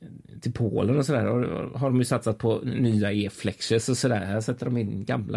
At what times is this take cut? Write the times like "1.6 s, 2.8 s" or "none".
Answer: none